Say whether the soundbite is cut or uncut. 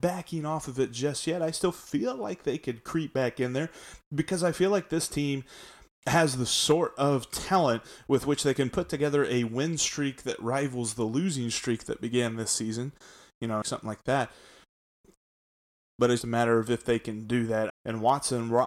cut